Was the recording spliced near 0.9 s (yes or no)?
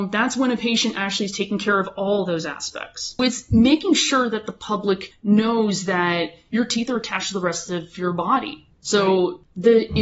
no